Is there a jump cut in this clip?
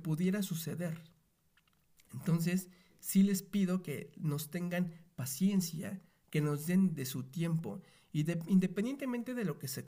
no; 0 cuts

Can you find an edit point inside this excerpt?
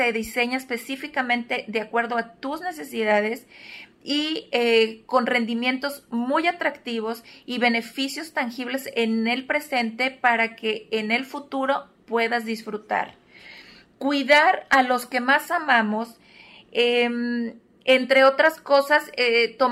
no; 0 cuts

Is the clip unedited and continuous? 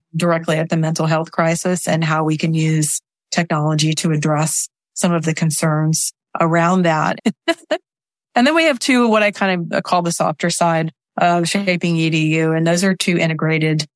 no; 1 cut; at 7.2 s

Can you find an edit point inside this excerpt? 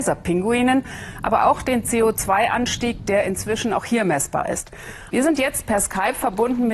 yes; 1 cut; at 5.1 s

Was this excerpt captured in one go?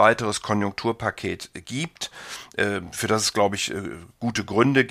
yes; 0 cuts

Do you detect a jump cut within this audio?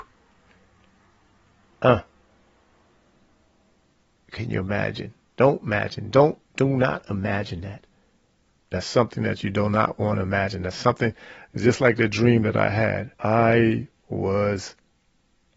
yes; 2 cuts; at 8.6 s, 13.2 s

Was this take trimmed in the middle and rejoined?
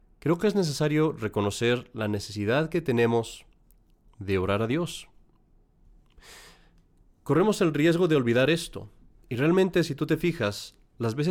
no; 0 cuts

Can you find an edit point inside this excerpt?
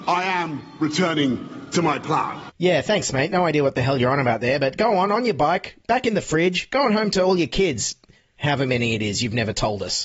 no; 0 cuts

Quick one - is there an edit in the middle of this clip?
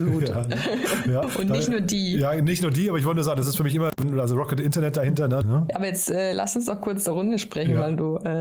yes; 2 cuts; at 1.2 s, 5.4 s

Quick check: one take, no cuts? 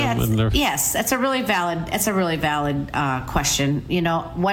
yes; 0 cuts

